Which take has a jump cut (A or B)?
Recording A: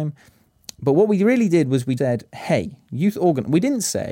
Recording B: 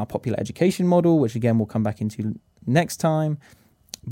A